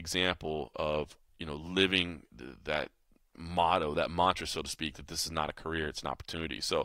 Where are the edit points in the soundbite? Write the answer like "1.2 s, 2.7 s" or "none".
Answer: 2.3 s